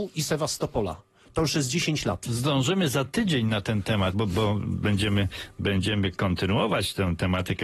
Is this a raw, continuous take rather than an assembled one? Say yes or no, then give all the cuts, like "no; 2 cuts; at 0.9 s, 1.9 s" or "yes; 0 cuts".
no; 1 cut; at 4.1 s